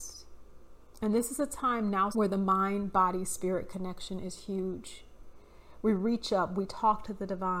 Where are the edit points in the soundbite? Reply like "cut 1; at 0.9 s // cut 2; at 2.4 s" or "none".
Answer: cut 1; at 2.1 s